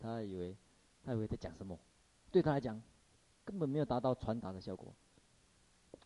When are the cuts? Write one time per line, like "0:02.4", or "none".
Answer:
none